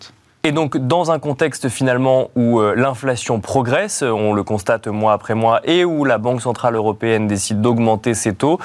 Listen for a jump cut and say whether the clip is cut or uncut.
uncut